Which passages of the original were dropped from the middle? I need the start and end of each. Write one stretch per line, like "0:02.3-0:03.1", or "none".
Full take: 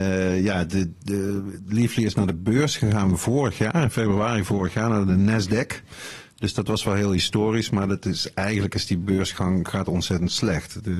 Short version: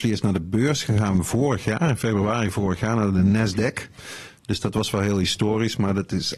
none